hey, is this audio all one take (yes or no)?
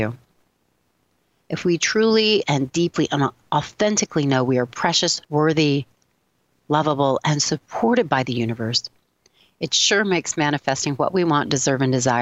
no